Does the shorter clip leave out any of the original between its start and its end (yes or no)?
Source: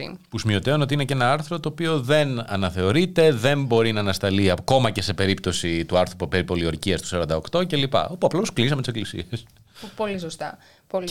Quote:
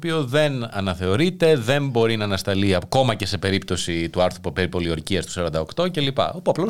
no